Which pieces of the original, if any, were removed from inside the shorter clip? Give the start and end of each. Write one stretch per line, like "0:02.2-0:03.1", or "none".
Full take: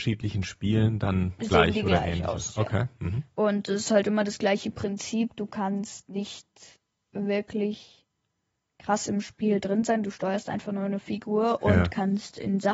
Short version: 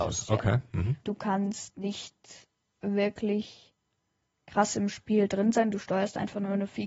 0:03.3-0:05.4